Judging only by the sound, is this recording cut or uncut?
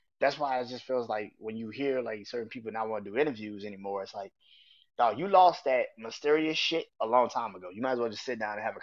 uncut